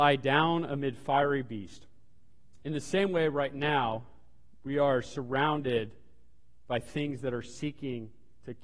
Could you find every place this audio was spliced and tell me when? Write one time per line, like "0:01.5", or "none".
0:02.6